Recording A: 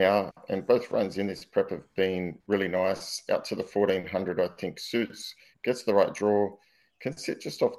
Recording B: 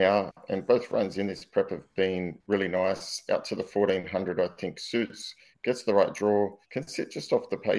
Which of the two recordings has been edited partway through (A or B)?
B